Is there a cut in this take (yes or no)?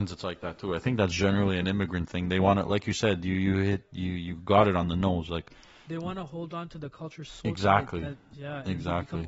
no